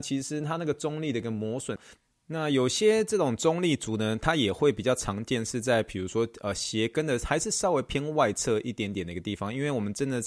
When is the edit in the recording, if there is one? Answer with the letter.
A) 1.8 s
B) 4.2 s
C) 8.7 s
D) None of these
A